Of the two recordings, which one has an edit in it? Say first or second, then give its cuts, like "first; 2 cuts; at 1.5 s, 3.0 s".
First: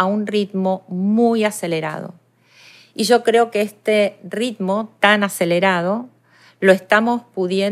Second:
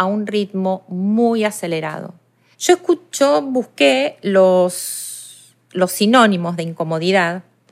second; 2 cuts; at 2.5 s, 5.7 s